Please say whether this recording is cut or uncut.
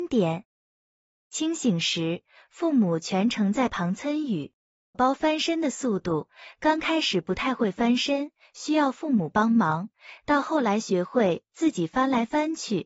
cut